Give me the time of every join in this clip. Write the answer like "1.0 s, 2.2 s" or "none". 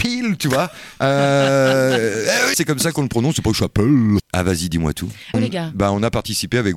2.5 s, 4.2 s, 5.3 s